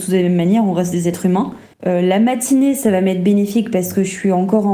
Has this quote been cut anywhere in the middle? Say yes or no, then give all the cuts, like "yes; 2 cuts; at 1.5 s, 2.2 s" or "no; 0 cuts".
yes; 1 cut; at 1.7 s